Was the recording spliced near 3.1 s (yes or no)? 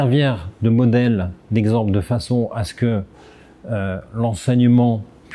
no